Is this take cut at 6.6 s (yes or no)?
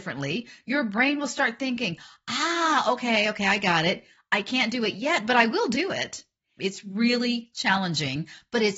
yes